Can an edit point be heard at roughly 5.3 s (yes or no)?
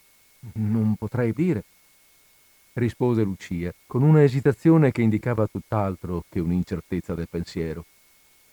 no